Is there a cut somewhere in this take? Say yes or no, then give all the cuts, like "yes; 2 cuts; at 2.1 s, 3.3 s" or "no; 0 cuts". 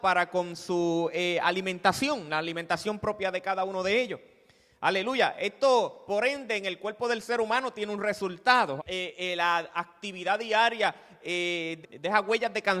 yes; 2 cuts; at 8.8 s, 11.8 s